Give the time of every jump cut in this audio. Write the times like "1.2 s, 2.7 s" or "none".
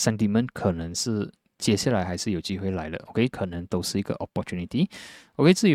3.3 s